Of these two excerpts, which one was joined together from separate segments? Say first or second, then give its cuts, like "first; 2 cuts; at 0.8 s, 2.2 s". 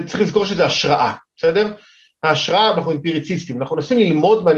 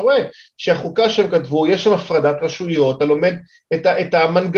first; 1 cut; at 2.7 s